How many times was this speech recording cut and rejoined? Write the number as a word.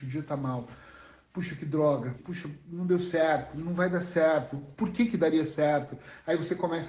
one